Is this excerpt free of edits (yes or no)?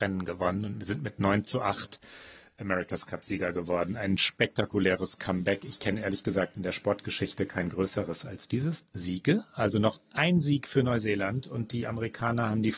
no